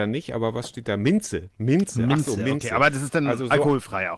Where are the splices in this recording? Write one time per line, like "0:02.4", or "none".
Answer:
none